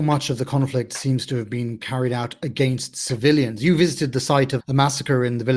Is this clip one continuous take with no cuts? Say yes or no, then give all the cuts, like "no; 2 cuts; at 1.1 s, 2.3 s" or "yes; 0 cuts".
no; 1 cut; at 4.6 s